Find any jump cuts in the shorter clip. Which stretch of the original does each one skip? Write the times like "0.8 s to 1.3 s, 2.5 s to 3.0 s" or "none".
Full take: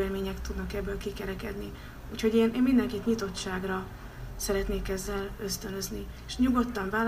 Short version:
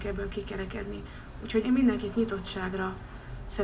2.3 s to 2.5 s